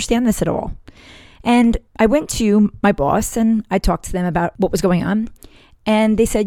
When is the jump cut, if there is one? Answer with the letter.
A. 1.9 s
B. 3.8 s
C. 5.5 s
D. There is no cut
A